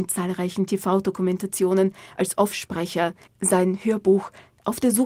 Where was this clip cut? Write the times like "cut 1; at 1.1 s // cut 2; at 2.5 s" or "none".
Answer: cut 1; at 3.3 s